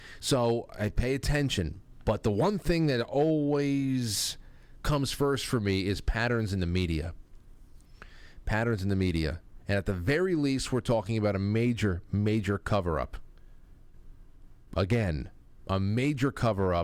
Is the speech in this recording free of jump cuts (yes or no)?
yes